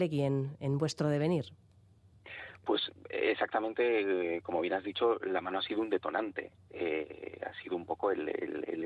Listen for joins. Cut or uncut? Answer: uncut